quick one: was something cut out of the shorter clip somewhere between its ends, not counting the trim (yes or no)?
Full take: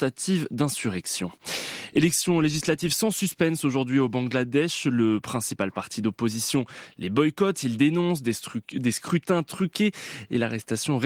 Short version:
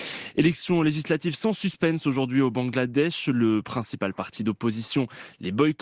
no